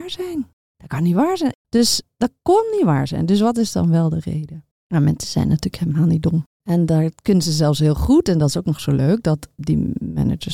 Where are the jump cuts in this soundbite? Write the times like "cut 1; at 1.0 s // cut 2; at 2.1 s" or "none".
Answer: cut 1; at 1.5 s // cut 2; at 6.5 s